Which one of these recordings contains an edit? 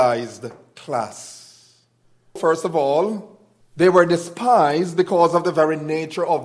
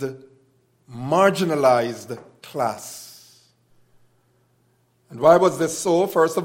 first; 2 cuts; at 2.4 s, 3.6 s

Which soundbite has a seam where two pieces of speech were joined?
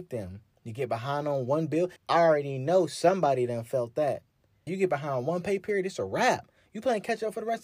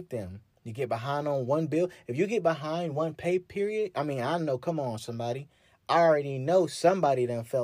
first; 2 cuts; at 2.0 s, 4.7 s

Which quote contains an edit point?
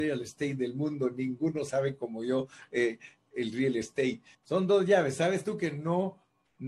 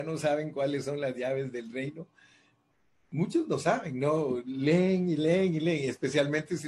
first; 1 cut; at 4.3 s

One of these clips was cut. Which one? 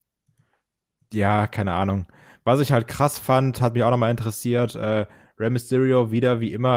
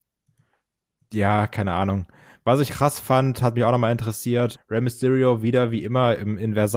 second; 2 cuts; at 2.7 s, 4.5 s

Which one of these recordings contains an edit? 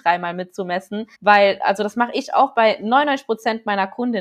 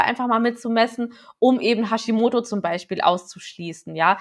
first; 1 cut; at 1.1 s

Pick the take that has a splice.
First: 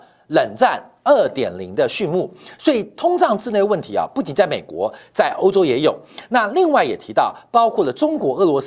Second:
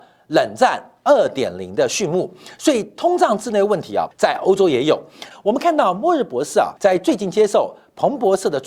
second; 3 cuts; at 4.1 s, 5.3 s, 6.8 s

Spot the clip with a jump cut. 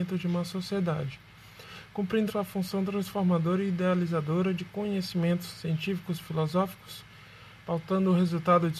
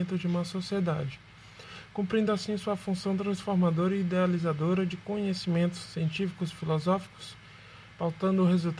first; 1 cut; at 2.3 s

